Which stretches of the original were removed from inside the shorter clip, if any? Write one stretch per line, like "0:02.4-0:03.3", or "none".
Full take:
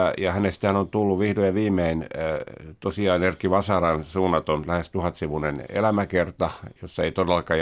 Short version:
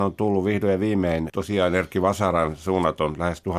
0:02.0-0:02.8

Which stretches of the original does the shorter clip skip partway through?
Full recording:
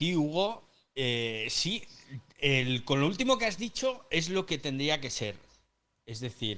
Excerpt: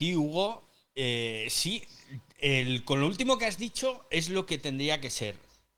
none

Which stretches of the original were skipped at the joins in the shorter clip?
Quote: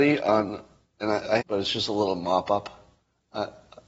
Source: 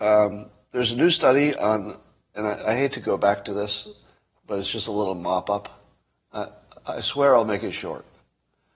0:02.8-0:04.4

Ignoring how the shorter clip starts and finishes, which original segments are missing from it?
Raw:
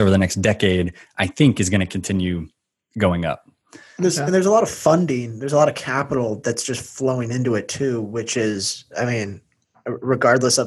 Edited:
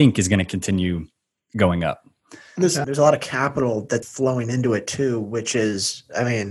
0:04.3-0:05.4
0:06.6-0:06.8

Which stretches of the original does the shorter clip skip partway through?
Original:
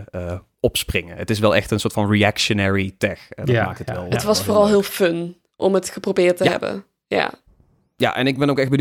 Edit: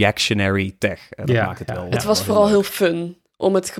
none

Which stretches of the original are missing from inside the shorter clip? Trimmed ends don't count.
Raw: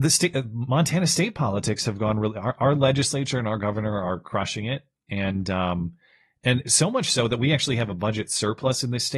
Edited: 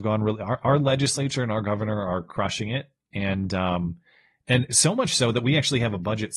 none

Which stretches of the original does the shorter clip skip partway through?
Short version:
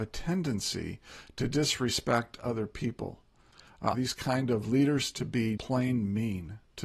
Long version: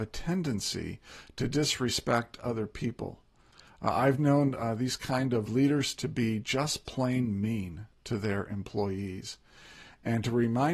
0:03.9-0:04.8
0:06.4-0:06.9

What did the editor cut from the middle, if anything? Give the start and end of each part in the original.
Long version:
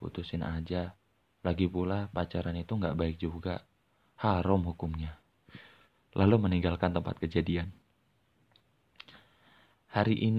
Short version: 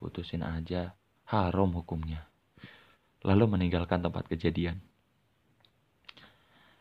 0:01.2-0:04.1

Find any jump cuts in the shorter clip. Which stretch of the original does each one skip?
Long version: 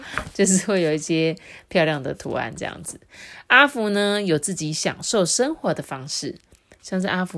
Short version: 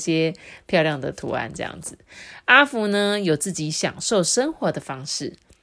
none

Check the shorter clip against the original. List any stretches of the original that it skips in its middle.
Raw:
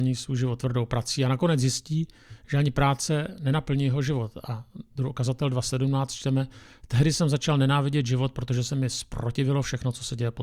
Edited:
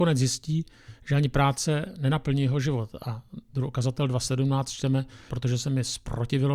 0:06.7-0:08.3

